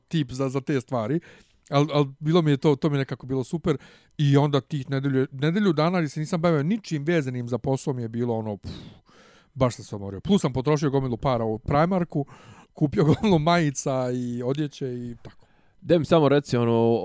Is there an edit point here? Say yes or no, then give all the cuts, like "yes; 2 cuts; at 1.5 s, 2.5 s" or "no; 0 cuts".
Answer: no; 0 cuts